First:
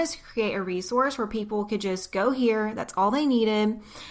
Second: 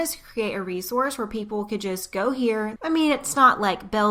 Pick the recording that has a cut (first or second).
second